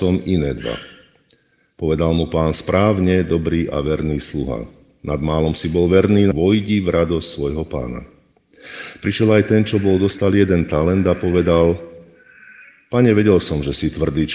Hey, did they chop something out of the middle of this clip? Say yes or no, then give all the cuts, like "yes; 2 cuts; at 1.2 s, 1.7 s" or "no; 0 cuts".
yes; 1 cut; at 6.3 s